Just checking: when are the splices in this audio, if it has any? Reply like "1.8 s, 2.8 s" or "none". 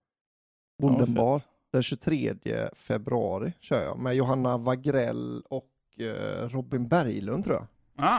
none